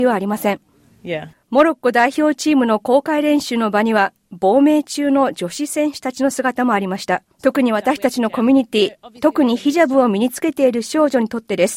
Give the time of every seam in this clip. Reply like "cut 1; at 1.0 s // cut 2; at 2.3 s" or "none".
cut 1; at 1.3 s // cut 2; at 7.4 s